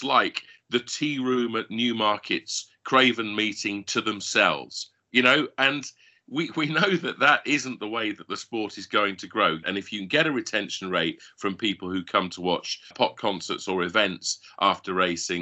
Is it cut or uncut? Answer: cut